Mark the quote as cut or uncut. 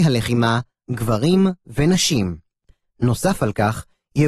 uncut